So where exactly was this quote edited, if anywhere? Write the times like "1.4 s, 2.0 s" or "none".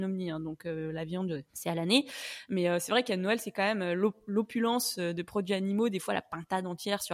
1.5 s

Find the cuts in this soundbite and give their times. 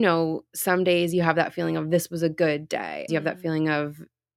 3.1 s

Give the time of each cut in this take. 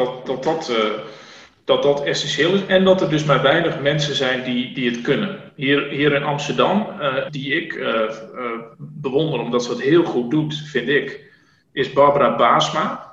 7.3 s

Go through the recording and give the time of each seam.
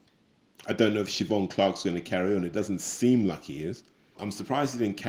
4.1 s

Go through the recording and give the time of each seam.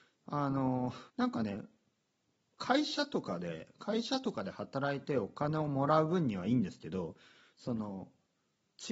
1.1 s

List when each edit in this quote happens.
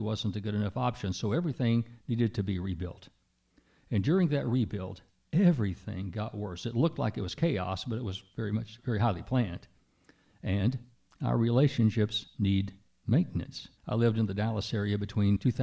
10.2 s, 13.8 s

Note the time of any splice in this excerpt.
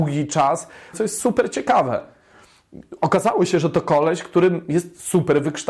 0.9 s

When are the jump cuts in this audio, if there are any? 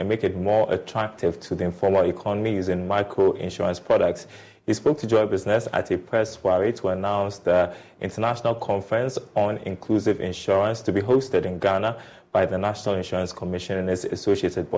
none

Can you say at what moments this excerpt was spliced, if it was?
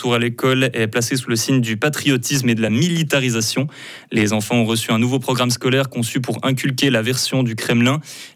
2.7 s

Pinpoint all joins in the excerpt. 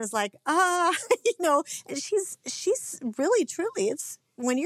none

